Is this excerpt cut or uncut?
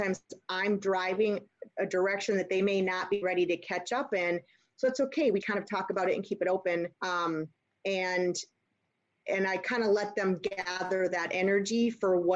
cut